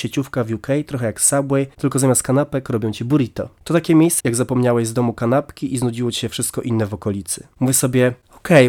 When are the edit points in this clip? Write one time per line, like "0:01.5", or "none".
0:04.2